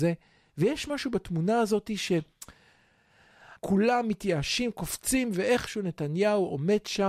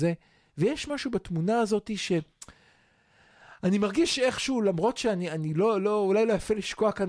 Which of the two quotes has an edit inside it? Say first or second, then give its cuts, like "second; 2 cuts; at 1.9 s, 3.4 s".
first; 1 cut; at 3.6 s